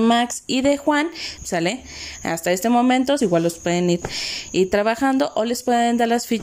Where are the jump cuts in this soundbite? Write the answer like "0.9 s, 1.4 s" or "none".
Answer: 1.4 s, 3.2 s